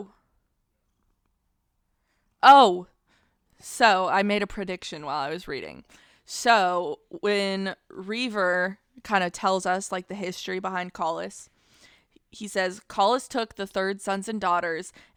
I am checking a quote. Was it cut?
no; 0 cuts

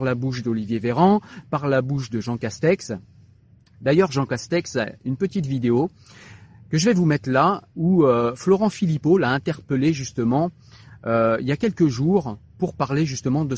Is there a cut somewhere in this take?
no; 0 cuts

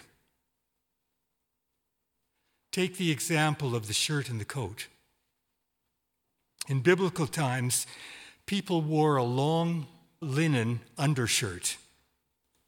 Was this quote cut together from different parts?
yes; 1 cut; at 10.2 s

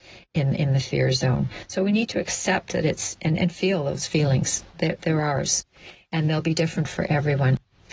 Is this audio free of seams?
yes; 0 cuts

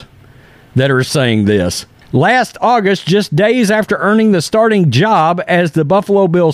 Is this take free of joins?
no; 1 cut; at 2.0 s

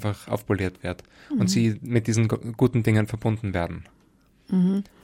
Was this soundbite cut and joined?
no; 0 cuts

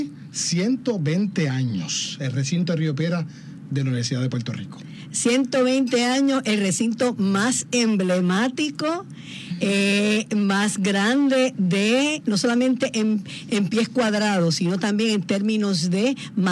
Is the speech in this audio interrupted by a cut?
no; 0 cuts

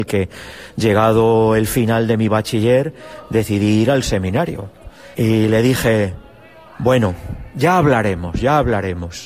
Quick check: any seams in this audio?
yes; 1 cut; at 5.1 s

